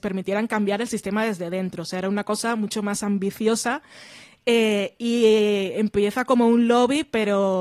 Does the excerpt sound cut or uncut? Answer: uncut